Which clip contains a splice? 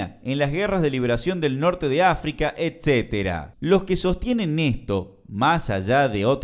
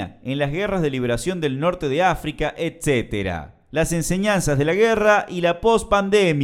first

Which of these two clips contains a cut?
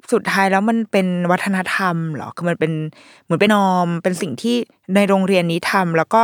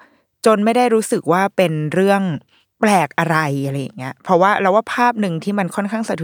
first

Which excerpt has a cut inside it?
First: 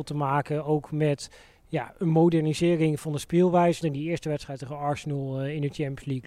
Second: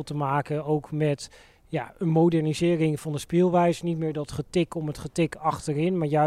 first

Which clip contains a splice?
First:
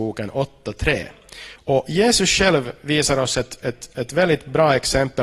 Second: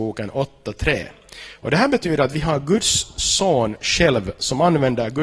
first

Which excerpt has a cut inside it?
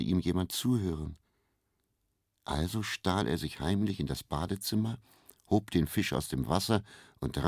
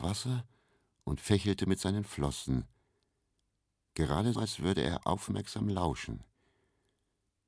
second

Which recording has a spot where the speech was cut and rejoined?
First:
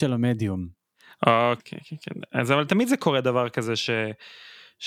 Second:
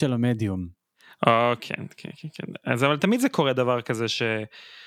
first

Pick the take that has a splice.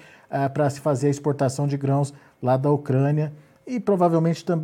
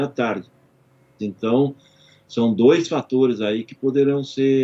second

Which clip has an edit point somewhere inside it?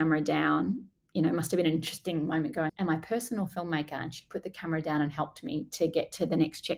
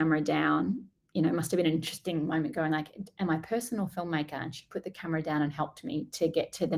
first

